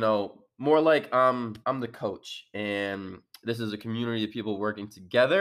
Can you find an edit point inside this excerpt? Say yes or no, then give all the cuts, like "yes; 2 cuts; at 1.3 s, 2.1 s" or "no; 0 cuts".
yes; 1 cut; at 1.6 s